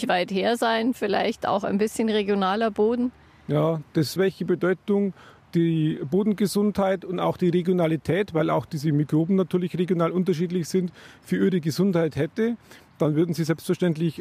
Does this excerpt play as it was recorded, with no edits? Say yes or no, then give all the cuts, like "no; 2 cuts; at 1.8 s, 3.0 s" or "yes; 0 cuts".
no; 1 cut; at 4.2 s